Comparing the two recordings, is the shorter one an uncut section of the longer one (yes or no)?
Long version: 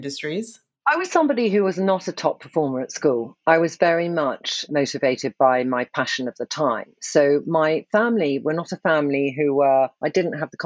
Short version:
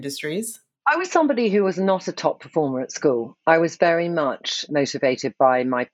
yes